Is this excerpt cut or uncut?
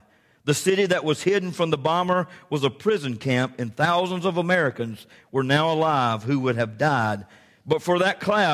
uncut